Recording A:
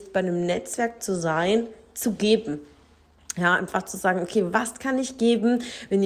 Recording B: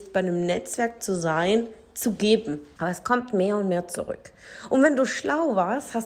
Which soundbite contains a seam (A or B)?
B